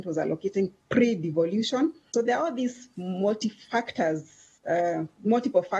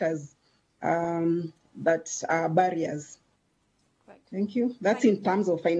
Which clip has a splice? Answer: first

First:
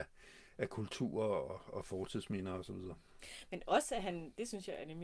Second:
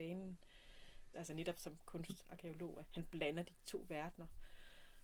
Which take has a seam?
second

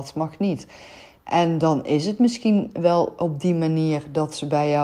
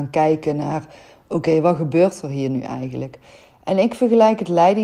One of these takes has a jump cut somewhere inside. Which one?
first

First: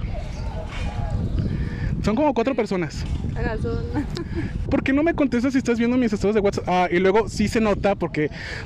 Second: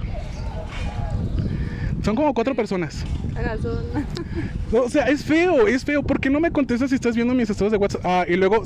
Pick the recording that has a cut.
first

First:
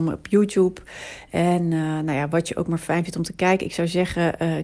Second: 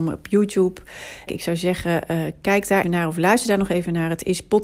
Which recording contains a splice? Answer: second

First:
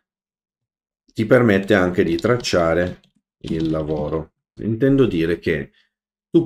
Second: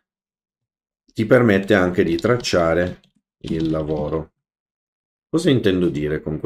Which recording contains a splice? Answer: first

